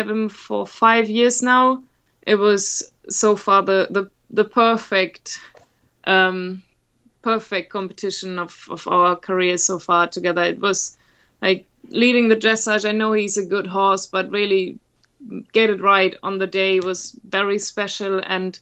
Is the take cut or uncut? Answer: cut